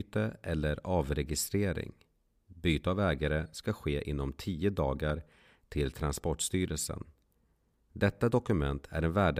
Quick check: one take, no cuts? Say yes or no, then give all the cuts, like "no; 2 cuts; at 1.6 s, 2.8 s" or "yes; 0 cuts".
yes; 0 cuts